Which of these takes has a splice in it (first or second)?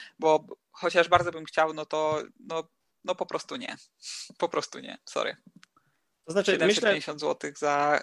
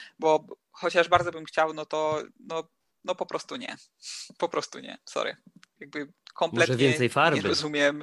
second